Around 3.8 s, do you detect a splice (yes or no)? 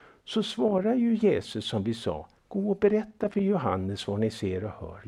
no